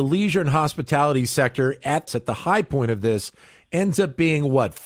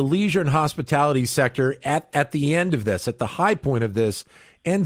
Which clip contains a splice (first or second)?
first